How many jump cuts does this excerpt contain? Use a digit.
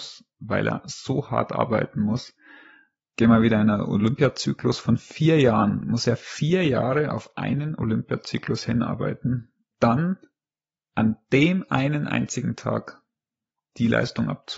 2